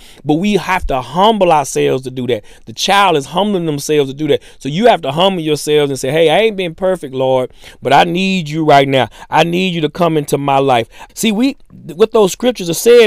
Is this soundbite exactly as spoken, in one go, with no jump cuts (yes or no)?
no